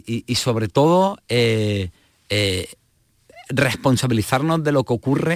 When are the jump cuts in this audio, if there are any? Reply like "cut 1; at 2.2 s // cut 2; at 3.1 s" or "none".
none